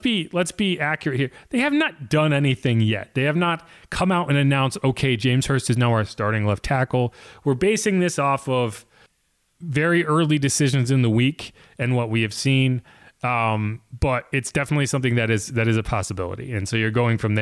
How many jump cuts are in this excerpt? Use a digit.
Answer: 0